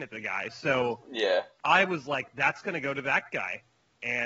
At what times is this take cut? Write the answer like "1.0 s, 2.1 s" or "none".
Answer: 1.6 s